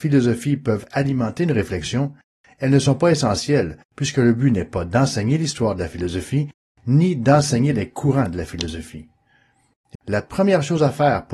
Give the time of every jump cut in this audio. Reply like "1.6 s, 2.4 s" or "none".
9.9 s